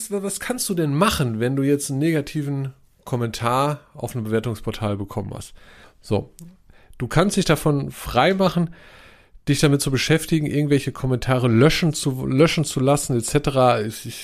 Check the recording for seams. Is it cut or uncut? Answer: cut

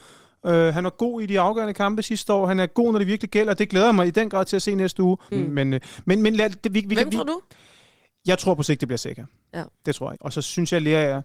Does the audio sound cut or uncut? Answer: cut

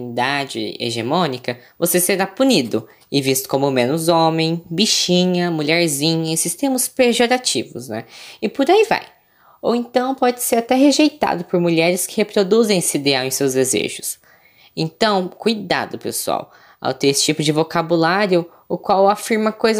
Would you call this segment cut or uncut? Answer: uncut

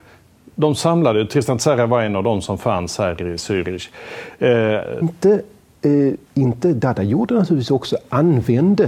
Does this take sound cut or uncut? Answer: cut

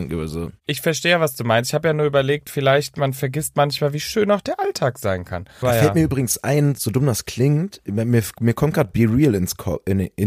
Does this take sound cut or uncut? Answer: cut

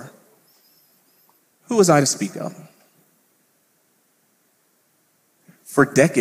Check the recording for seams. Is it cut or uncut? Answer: cut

